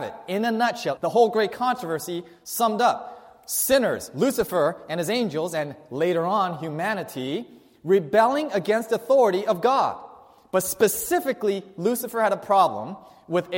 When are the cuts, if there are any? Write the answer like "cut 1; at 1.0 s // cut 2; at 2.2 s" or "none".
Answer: cut 1; at 1.0 s